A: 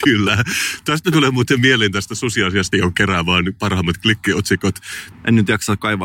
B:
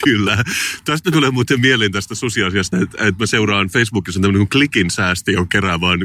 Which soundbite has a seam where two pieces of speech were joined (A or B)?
A